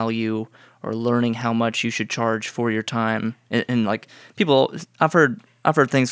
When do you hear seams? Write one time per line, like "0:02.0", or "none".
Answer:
none